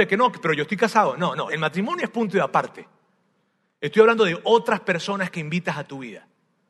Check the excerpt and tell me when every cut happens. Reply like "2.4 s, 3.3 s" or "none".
1.5 s